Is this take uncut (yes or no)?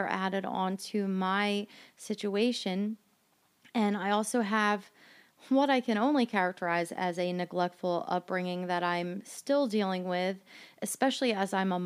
yes